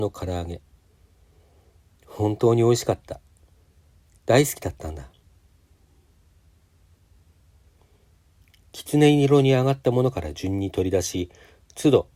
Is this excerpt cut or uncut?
uncut